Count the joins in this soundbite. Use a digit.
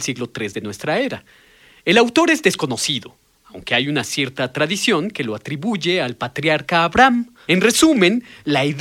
1